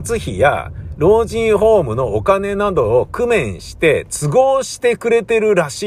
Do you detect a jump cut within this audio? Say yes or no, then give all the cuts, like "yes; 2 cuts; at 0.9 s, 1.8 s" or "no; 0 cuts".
no; 0 cuts